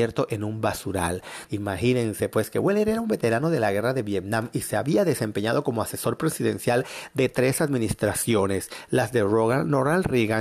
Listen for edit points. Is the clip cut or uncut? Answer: cut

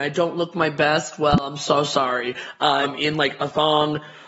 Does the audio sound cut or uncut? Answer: cut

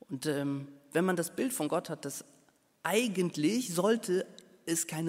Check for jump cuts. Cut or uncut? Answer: uncut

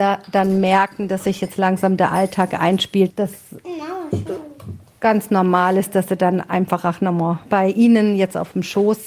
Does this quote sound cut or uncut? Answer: cut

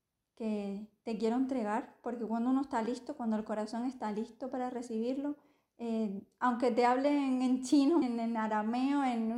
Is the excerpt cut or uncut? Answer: cut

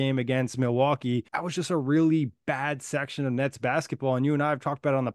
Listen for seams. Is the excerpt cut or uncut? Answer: cut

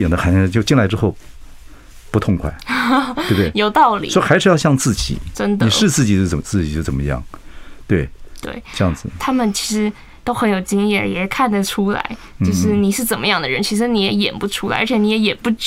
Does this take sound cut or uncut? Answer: cut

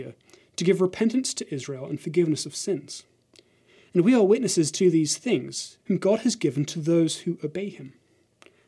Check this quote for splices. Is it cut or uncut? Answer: cut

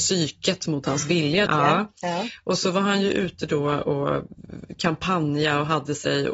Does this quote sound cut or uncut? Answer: cut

